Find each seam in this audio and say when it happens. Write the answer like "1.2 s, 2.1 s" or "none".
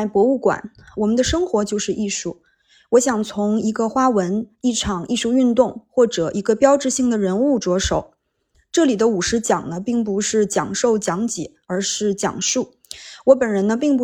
8.5 s